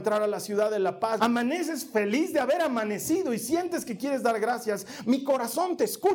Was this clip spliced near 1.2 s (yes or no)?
yes